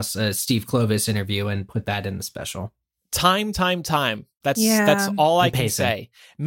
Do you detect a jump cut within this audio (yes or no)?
no